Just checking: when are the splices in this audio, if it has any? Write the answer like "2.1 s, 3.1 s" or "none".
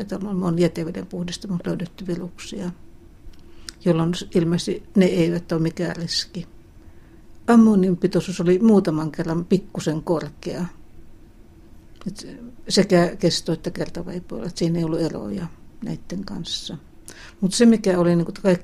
none